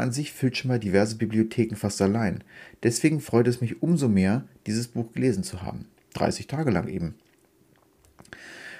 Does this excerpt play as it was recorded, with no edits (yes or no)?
no